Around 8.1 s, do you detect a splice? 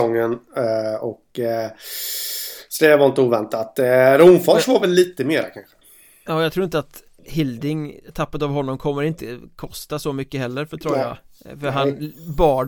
no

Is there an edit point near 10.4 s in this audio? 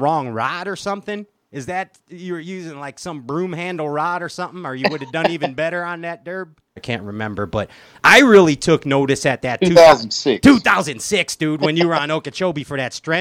no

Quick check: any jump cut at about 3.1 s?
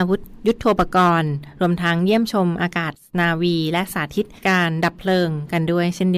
no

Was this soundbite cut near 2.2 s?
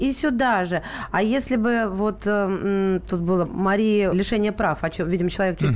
no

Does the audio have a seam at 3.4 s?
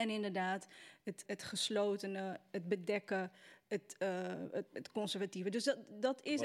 no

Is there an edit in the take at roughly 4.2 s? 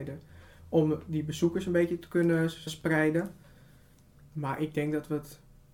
no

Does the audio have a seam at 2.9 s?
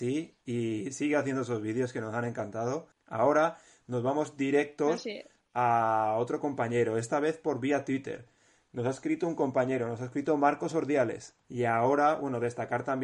yes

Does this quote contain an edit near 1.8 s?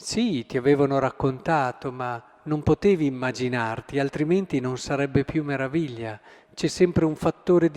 no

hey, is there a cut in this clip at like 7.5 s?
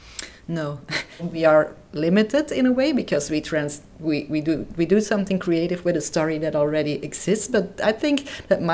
no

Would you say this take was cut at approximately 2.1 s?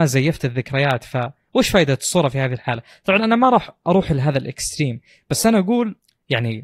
no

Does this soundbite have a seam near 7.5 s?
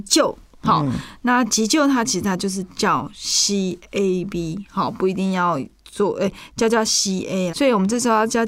yes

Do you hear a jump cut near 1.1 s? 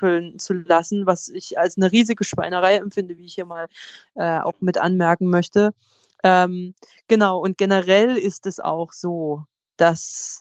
no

